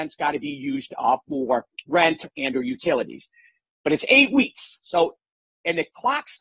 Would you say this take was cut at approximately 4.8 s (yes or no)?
no